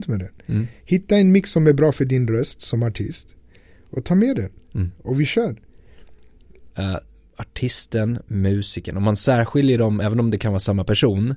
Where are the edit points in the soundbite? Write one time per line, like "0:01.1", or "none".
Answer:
0:06.7